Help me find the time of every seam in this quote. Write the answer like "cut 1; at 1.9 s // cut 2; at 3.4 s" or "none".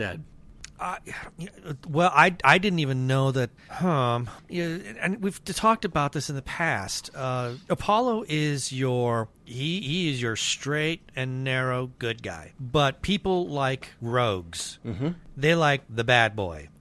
cut 1; at 4.4 s

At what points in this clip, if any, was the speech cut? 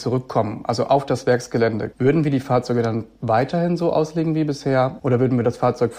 cut 1; at 1.9 s // cut 2; at 5.0 s

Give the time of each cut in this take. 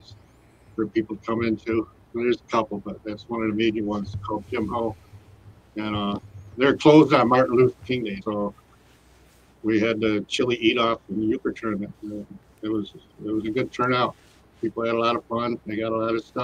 cut 1; at 8.2 s

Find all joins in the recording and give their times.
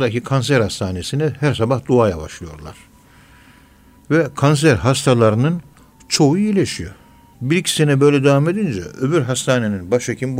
cut 1; at 7.3 s

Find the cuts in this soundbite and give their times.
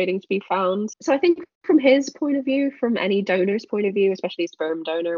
cut 1; at 0.9 s

